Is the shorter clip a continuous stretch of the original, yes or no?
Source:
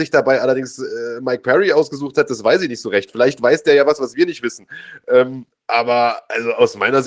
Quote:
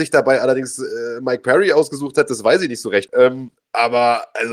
no